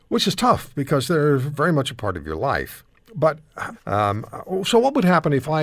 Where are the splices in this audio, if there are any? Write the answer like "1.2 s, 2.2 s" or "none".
3.7 s